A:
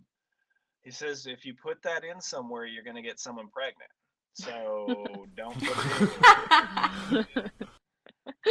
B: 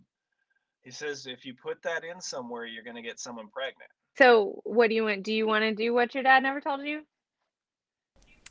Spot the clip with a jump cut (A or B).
B